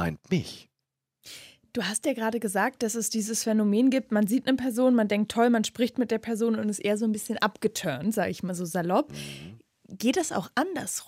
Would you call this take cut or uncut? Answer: uncut